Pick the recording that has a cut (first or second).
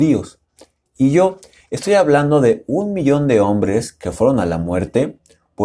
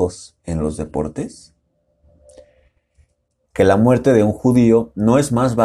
second